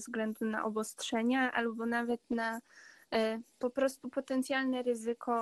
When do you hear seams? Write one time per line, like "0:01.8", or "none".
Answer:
0:03.5

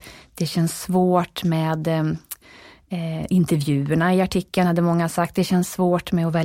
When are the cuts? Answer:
none

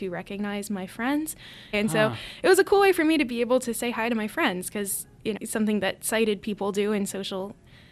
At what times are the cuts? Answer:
0:01.7
0:05.4

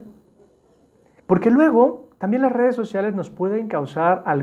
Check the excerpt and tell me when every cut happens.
0:01.2

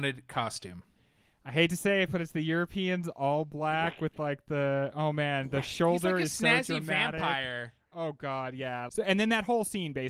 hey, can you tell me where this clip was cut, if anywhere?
0:08.9

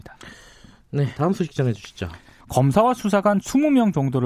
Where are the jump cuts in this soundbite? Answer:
0:01.2
0:02.4

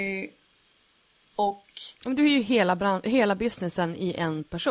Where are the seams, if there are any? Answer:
0:01.9

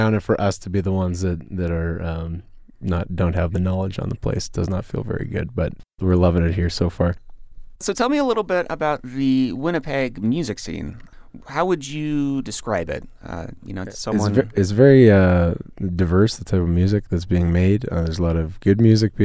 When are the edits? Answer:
none

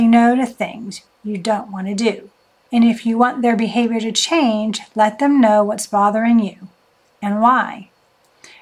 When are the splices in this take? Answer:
0:02.6

